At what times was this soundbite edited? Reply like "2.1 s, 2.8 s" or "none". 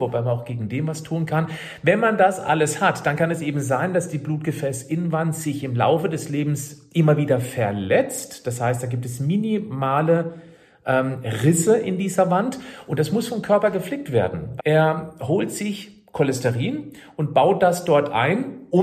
14.6 s